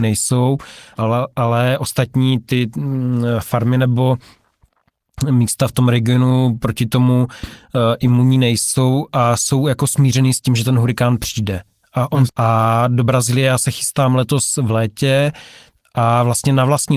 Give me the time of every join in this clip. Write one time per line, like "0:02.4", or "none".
0:00.9
0:12.3